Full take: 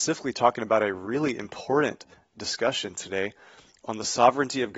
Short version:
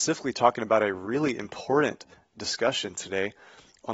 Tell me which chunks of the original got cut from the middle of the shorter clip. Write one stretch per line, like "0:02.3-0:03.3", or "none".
none